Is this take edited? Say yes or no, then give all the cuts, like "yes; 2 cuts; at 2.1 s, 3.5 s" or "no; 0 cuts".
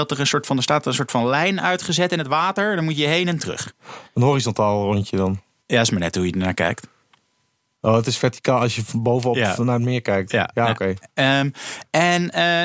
no; 0 cuts